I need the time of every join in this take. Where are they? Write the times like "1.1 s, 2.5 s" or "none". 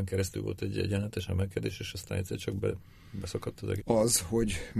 3.8 s